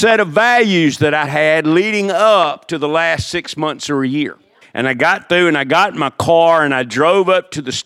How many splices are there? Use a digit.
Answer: 2